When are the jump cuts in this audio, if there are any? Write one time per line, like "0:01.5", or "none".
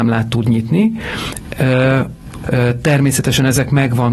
0:02.4